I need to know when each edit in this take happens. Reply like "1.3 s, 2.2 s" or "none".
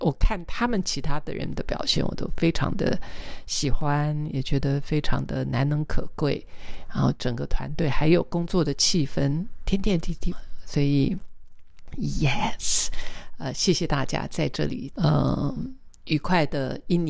10.3 s, 14.9 s

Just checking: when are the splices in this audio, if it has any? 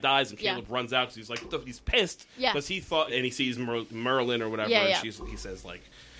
3.1 s

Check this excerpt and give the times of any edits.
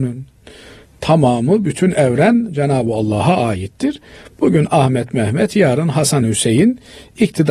none

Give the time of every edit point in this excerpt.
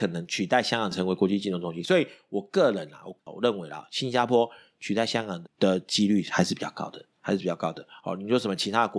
5.4 s

